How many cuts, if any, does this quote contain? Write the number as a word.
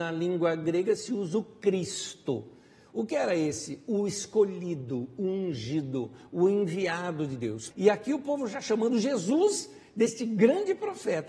one